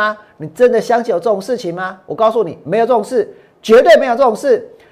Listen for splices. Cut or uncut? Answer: uncut